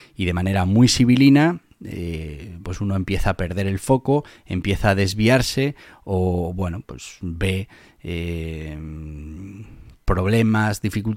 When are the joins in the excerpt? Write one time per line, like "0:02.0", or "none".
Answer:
0:02.6